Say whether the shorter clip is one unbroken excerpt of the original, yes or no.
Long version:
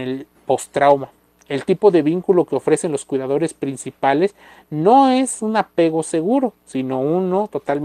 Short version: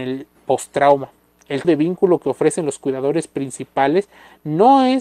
no